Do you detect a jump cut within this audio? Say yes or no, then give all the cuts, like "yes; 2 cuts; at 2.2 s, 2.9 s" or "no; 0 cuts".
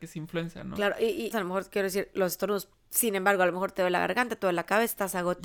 yes; 1 cut; at 1.3 s